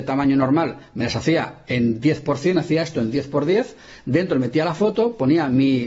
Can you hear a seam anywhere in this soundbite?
no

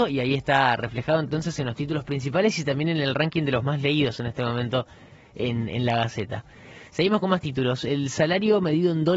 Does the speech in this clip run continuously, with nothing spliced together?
yes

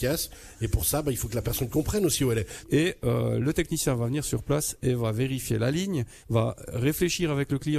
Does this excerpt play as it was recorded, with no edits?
no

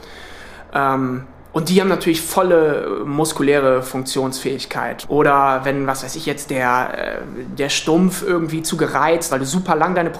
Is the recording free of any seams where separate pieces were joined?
no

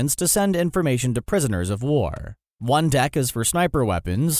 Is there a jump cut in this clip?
yes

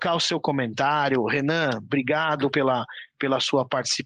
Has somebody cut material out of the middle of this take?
no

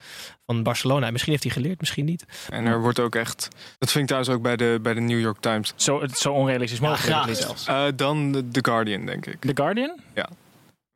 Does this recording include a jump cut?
yes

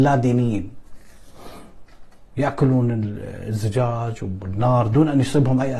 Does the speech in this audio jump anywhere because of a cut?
yes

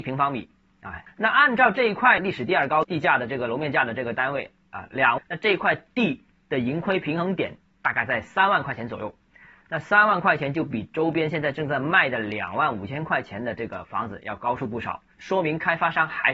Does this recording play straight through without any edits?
no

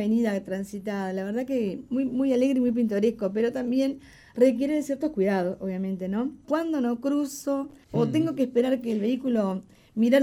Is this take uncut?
no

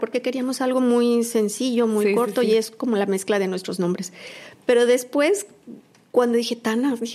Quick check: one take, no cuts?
yes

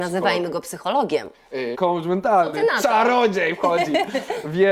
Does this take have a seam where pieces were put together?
yes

